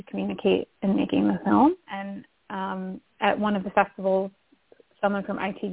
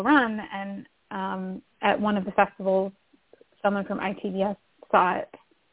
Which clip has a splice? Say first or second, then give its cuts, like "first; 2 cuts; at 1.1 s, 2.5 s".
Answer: first; 1 cut; at 1.9 s